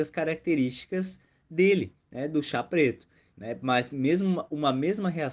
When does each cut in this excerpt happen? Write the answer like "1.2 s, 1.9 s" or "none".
3.3 s